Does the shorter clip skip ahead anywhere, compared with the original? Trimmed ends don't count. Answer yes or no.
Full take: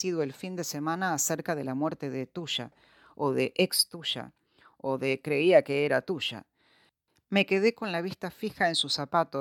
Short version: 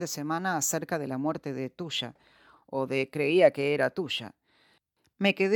yes